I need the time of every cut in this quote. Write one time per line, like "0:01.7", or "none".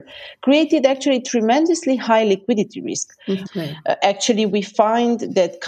0:03.4